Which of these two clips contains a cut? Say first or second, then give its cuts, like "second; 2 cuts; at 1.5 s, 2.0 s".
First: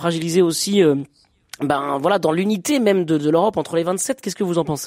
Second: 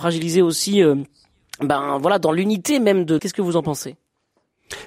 second; 1 cut; at 3.2 s